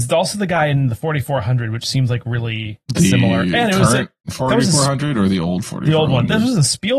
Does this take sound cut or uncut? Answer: cut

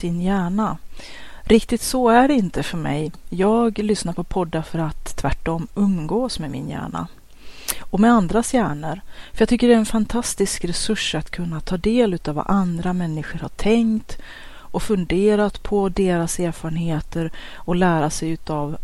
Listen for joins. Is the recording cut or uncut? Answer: uncut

